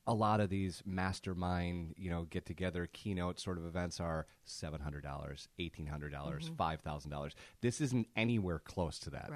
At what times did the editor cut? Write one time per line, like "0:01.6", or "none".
none